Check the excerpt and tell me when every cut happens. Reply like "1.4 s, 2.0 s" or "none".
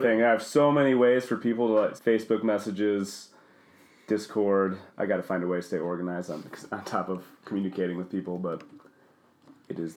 2.0 s, 4.9 s

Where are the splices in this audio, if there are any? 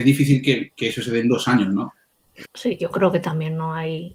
2.4 s

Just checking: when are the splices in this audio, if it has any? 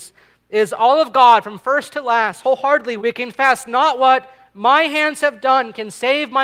3.0 s

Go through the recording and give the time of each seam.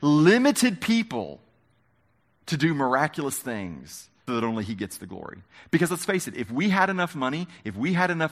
4.3 s

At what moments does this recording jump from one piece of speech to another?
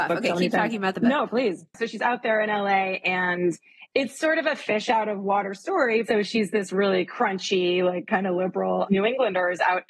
1.7 s

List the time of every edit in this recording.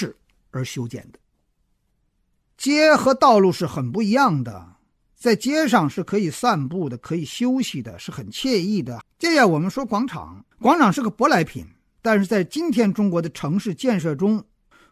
9.0 s, 10.5 s

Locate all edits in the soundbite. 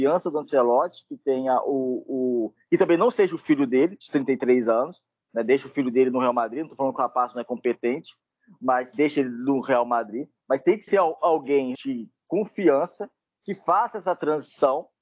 11.7 s

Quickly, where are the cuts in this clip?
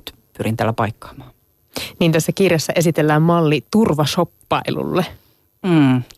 none

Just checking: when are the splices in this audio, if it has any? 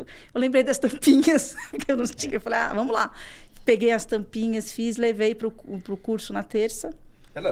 2.3 s

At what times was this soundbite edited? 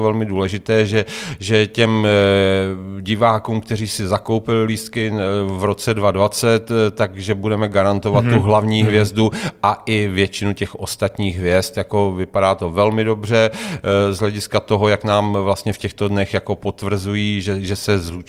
none

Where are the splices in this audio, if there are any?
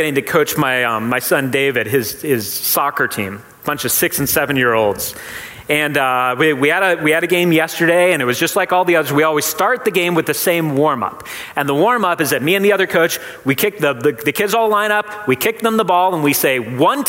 none

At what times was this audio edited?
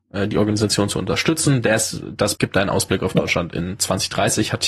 2.3 s

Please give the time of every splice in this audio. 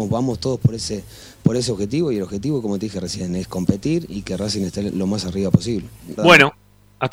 6.2 s

